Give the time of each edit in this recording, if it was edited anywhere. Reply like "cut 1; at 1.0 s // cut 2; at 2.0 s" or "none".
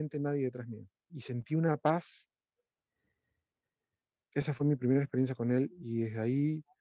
cut 1; at 1.1 s